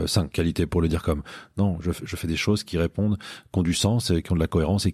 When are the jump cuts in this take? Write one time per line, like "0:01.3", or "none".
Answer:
0:01.5